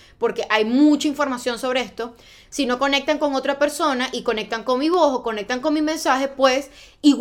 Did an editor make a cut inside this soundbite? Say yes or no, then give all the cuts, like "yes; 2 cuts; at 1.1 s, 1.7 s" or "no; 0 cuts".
no; 0 cuts